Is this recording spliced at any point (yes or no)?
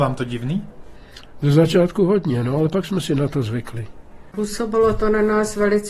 no